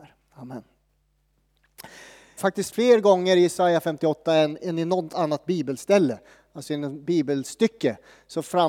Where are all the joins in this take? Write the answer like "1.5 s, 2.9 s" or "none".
2.4 s

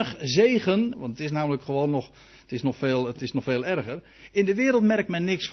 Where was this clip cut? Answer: 0.9 s

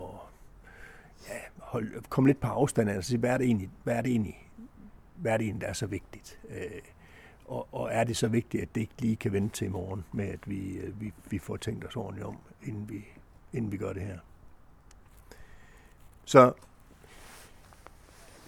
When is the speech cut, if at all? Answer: none

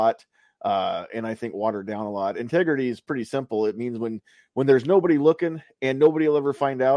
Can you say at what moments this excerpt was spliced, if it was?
none

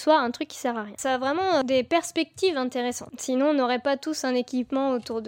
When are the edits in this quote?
3.1 s

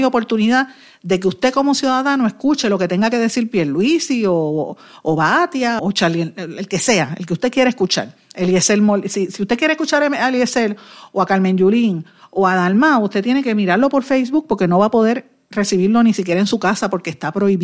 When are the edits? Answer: 5.8 s

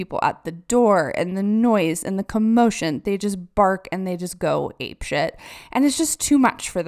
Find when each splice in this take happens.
none

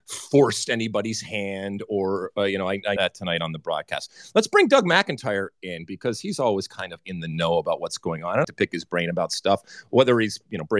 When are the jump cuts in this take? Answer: 3.0 s, 8.4 s

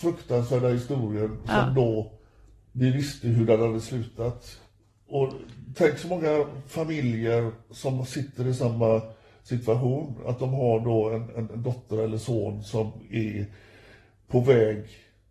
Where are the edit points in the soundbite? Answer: none

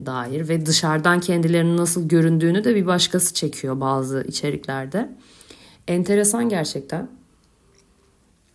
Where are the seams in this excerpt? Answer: none

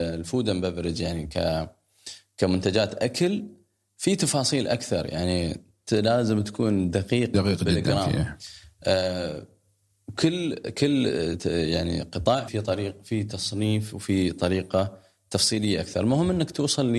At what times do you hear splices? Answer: 12.5 s

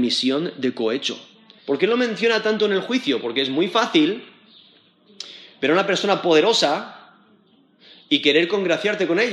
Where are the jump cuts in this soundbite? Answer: 1.6 s

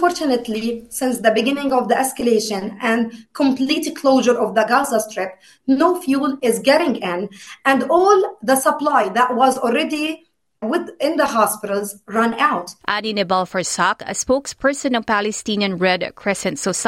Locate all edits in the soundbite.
10.6 s, 12.8 s

